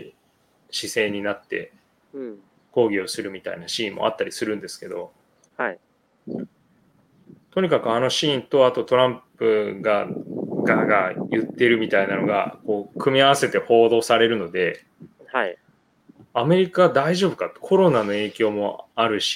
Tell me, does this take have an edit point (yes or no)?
no